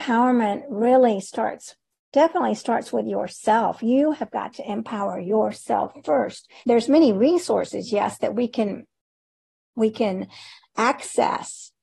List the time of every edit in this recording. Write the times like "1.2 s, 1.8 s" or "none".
6.6 s